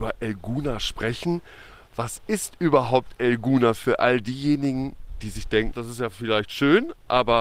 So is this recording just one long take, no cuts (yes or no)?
no